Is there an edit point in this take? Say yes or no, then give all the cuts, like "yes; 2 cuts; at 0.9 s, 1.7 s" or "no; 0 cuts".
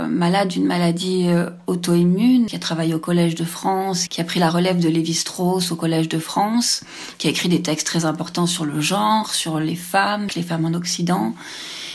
yes; 3 cuts; at 2.5 s, 4.1 s, 10.3 s